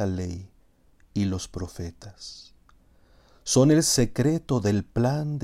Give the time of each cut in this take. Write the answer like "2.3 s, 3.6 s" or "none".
none

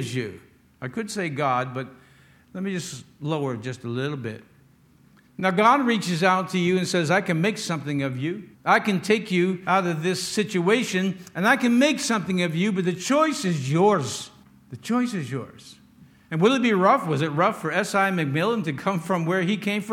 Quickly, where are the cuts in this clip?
none

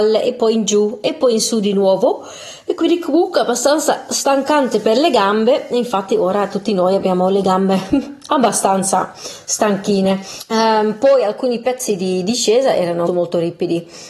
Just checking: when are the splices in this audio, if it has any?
13.1 s

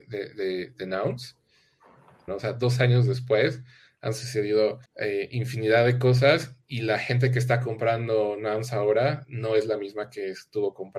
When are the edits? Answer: 2.3 s, 4.9 s

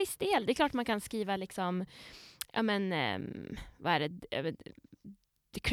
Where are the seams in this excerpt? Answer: none

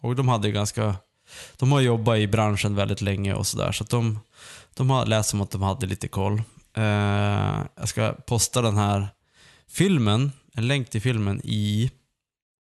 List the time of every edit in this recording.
none

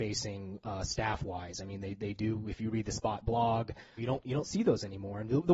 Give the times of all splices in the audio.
4.0 s

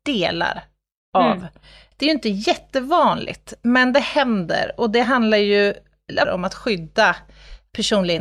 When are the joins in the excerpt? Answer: 1.9 s, 6.2 s

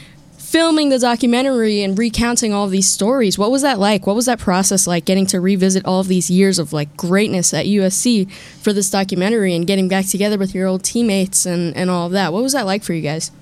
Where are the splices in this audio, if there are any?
none

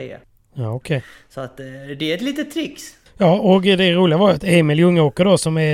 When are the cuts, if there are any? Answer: none

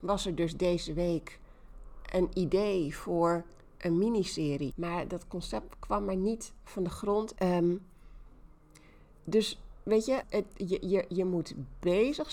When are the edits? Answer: 4.7 s, 7.4 s, 10.2 s

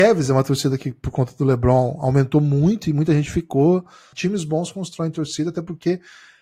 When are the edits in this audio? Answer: 4.1 s

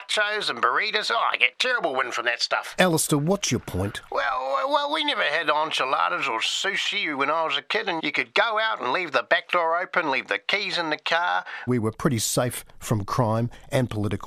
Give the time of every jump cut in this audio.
8.0 s, 11.7 s

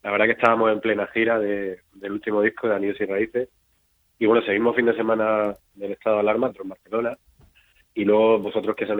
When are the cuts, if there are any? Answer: 6.5 s

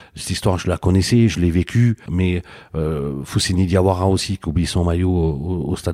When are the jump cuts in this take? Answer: 2.1 s

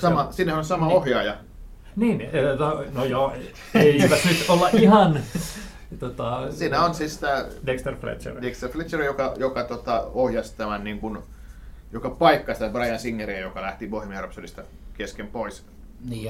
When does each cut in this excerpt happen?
none

